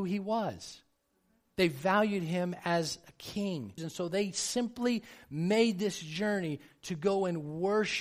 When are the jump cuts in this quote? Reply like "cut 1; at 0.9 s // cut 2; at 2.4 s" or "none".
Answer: cut 1; at 3.8 s